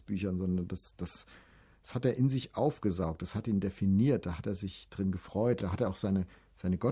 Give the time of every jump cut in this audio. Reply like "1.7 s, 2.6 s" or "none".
none

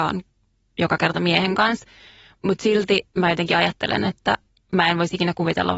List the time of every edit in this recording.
3.1 s

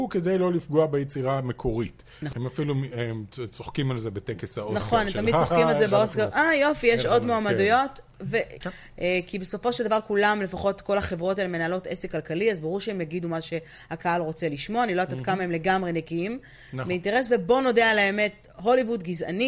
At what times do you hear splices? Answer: 2.3 s, 8.6 s

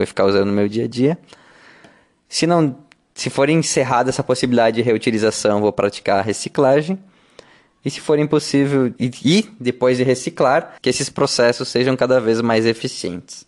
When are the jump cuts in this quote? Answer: 9.0 s, 10.8 s

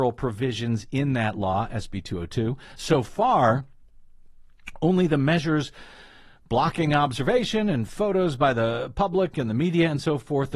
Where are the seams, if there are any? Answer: none

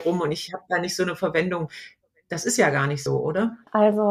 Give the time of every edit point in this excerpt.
none

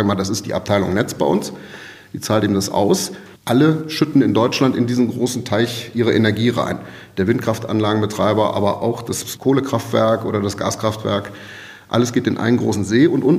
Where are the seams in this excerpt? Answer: 3.4 s

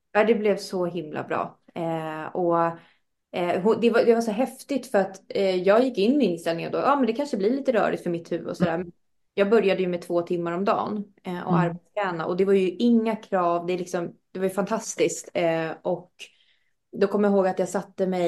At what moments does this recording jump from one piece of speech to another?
none

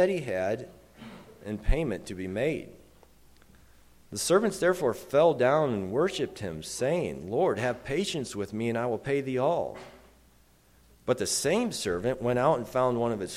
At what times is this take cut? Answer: 11.0 s

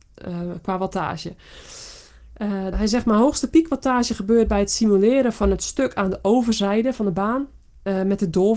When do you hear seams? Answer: 2.7 s

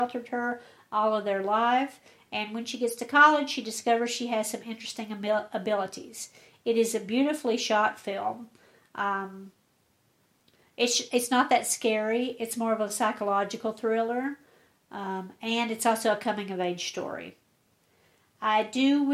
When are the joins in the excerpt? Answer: none

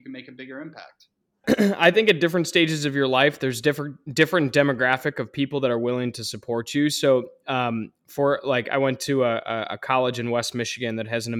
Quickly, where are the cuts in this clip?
1.4 s

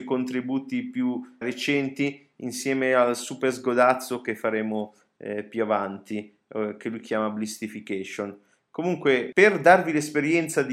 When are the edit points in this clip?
1.4 s

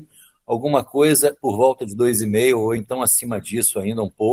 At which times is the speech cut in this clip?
none

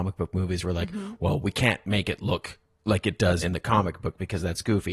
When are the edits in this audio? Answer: 3.4 s

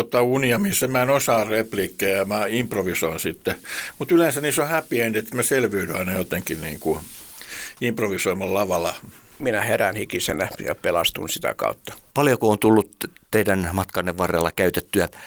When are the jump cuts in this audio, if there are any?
none

